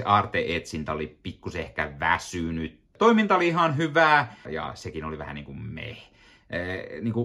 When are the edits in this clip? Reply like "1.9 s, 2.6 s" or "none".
3.0 s, 4.5 s